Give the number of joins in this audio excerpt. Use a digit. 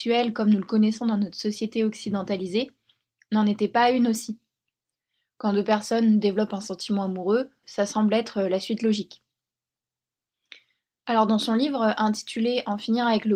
1